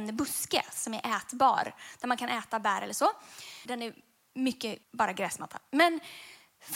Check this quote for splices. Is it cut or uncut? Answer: cut